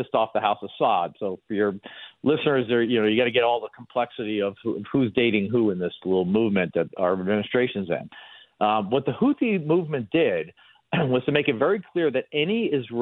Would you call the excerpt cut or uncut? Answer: uncut